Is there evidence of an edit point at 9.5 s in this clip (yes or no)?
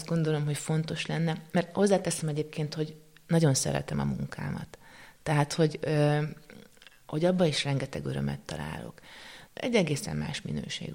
yes